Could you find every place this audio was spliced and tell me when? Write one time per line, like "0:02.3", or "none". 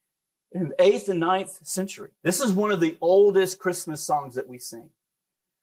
0:02.2